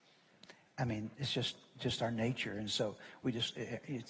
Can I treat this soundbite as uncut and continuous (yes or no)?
yes